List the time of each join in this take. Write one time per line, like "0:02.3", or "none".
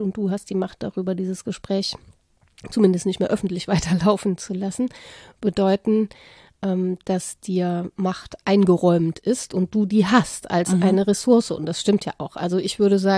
none